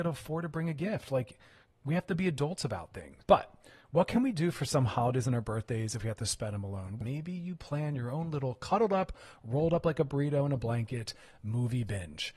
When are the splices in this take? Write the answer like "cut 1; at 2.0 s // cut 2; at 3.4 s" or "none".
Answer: cut 1; at 3.2 s // cut 2; at 7.0 s